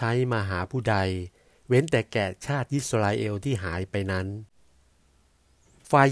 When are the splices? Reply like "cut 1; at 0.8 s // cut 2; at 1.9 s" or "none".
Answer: none